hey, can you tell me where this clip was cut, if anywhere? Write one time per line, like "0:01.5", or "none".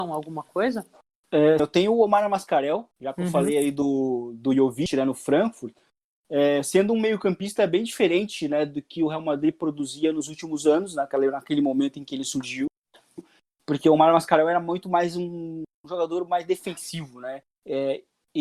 0:01.6
0:02.9
0:06.1